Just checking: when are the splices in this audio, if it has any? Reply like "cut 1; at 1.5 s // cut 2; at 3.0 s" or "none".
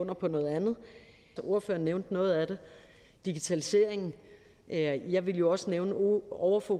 cut 1; at 1.4 s

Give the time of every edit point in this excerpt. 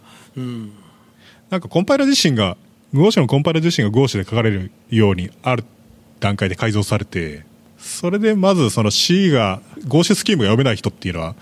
none

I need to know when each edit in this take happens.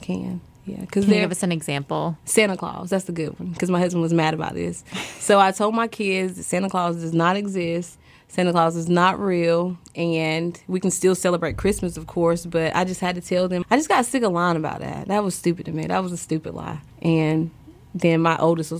cut 1; at 13.6 s // cut 2; at 16.9 s

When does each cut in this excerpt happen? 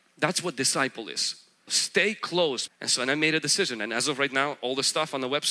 cut 1; at 1.7 s // cut 2; at 2.7 s

